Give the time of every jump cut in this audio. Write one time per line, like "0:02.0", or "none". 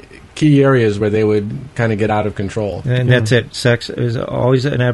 0:02.8

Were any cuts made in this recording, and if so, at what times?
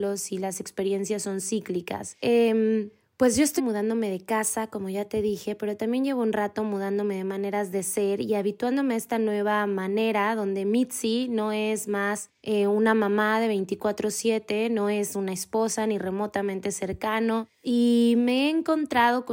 0:02.2
0:03.6

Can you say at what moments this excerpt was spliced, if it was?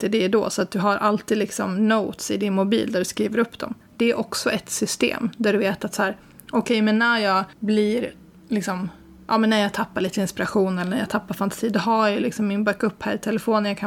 0:07.5

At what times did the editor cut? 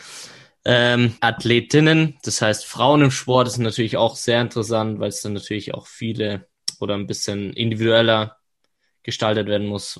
0:01.2

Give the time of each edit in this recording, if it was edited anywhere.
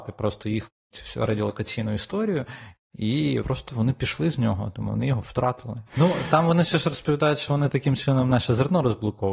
0:02.8
0:05.9

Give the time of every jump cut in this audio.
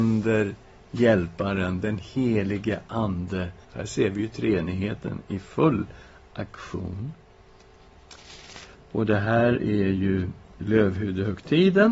0:03.6
0:08.7

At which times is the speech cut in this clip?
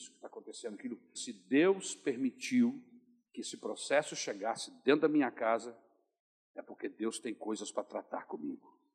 0:01.2

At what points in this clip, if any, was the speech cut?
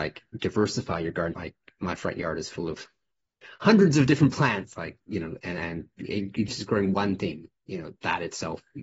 0:01.3
0:04.6
0:06.5

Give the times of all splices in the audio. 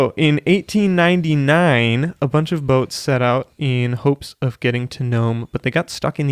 0:03.5

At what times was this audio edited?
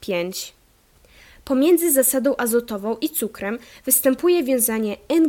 none

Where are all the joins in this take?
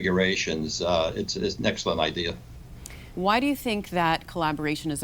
0:03.1

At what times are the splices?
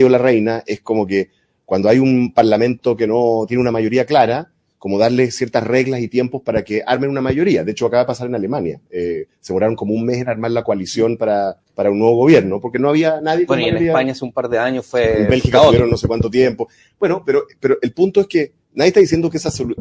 0:11.6

